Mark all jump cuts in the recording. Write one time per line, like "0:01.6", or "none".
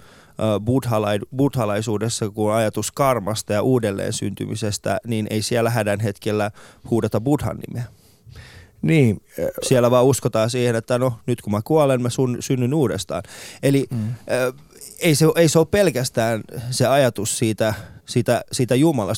0:18.0